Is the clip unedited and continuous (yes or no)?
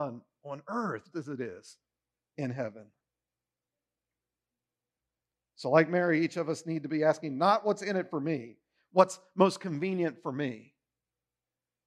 no